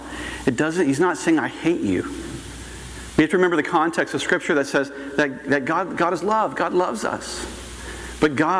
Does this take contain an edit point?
no; 0 cuts

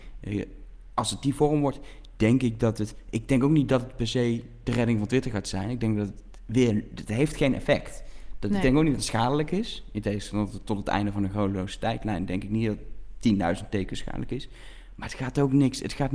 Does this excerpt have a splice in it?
no; 0 cuts

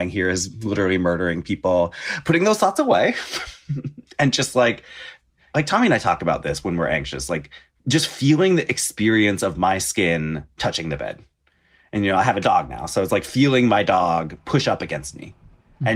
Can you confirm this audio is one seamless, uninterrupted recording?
no; 1 cut; at 5.5 s

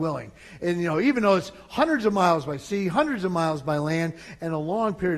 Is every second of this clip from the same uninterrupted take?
yes; 0 cuts

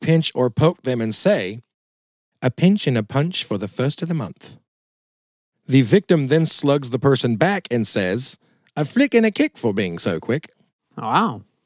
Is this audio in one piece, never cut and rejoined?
yes; 0 cuts

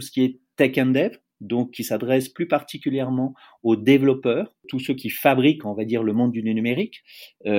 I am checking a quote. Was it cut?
no; 0 cuts

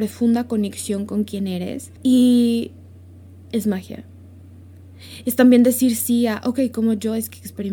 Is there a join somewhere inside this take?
yes; 2 cuts; at 2.0 s, 5.2 s

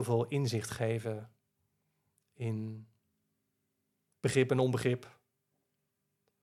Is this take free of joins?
yes; 0 cuts

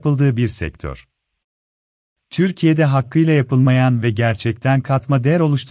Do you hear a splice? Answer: yes; 1 cut; at 2.2 s

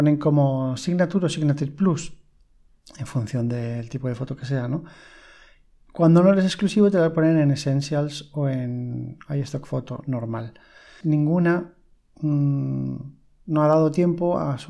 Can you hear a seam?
yes; 1 cut; at 11.0 s

